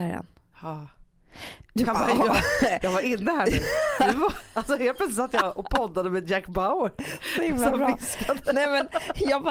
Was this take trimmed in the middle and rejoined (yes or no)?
no